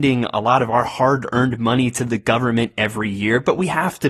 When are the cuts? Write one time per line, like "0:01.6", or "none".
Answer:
none